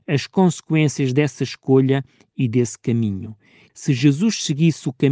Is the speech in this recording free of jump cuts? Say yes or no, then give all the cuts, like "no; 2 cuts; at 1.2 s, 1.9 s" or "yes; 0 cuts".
no; 1 cut; at 3.6 s